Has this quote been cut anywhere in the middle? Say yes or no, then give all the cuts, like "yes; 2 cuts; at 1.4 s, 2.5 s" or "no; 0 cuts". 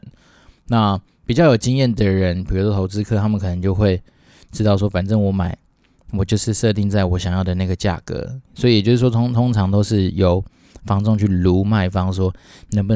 no; 0 cuts